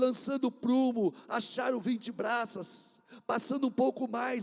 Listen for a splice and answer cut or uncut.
uncut